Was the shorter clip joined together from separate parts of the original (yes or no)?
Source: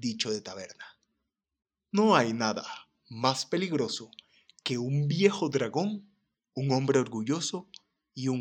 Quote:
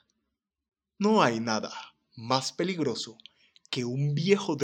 no